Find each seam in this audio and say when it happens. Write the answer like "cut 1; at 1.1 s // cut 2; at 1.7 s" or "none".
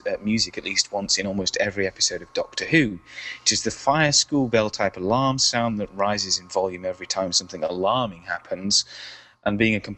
none